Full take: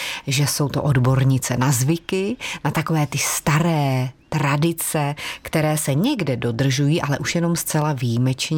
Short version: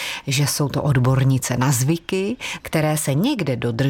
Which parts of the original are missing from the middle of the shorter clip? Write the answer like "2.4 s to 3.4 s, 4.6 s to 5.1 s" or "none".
2.6 s to 5.4 s